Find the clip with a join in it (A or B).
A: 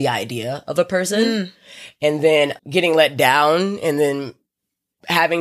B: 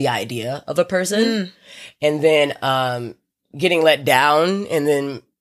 A